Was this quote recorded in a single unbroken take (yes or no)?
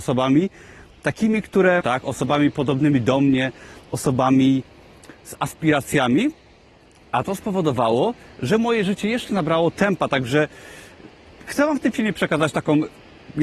no